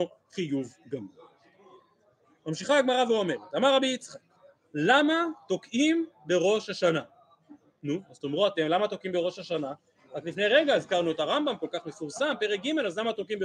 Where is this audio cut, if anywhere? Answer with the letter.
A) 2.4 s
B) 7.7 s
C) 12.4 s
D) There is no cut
D